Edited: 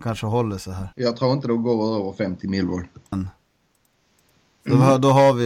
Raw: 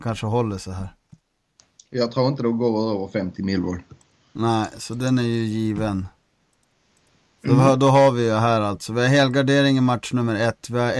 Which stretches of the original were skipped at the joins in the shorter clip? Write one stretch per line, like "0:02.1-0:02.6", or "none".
0:00.9-0:01.9
0:04.1-0:05.9